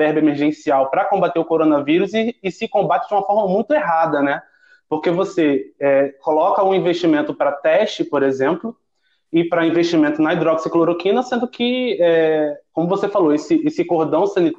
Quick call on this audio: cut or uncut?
uncut